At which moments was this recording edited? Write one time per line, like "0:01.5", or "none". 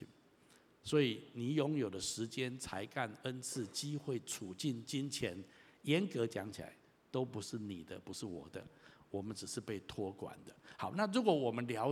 none